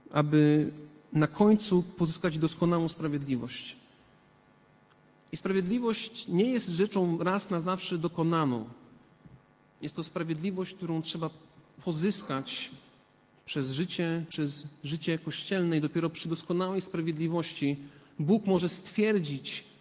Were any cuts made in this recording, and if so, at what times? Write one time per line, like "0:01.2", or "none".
0:14.3